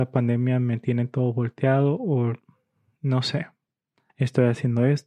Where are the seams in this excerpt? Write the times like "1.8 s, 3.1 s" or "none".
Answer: 4.1 s